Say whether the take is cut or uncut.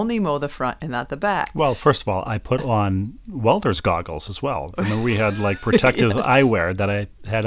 uncut